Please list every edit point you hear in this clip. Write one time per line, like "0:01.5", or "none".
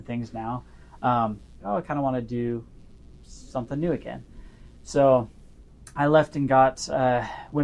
0:01.6